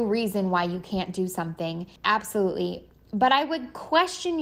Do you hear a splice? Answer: yes; 1 cut; at 2.0 s

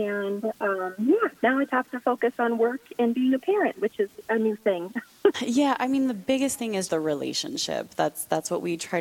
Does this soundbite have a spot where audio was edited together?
yes; 3 cuts; at 1.7 s, 5.3 s, 6.9 s

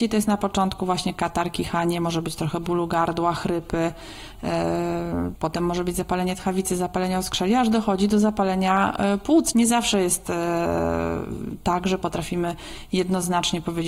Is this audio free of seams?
no; 2 cuts; at 5.4 s, 9.5 s

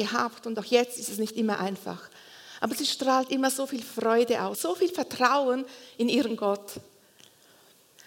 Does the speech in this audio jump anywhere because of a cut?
yes; 1 cut; at 4.5 s

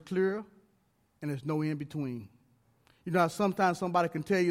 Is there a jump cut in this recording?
yes; 1 cut; at 1.1 s

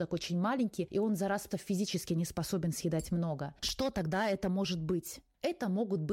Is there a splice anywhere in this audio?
yes; 2 cuts; at 1.5 s, 3.6 s

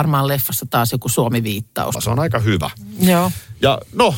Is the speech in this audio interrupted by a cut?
yes; 1 cut; at 1.9 s

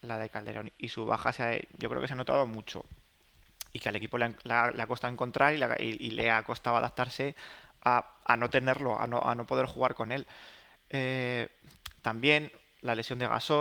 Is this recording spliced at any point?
no; 0 cuts

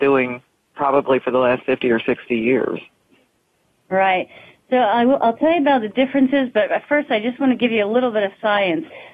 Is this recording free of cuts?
yes; 0 cuts

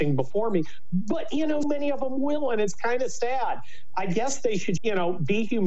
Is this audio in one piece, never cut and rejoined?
no; 2 cuts; at 1.6 s, 4.8 s

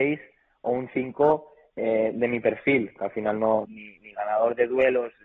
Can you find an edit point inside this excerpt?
yes; 1 cut; at 3.6 s

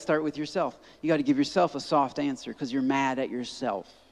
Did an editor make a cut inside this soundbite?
no; 0 cuts

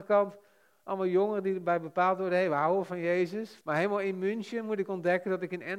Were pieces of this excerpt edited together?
yes; 1 cut; at 3.6 s

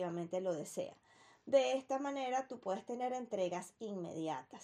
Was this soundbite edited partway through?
no; 0 cuts

